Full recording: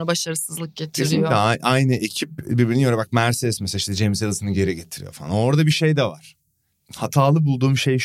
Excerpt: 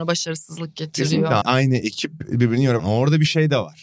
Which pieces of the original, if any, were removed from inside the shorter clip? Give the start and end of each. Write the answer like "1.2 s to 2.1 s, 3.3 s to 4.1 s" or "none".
1.4 s to 1.6 s, 3.0 s to 5.2 s